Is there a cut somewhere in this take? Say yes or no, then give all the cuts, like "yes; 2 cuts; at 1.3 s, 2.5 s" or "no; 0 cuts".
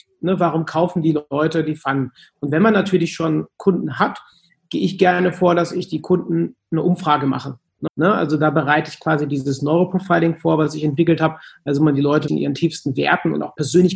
yes; 2 cuts; at 7.9 s, 12.3 s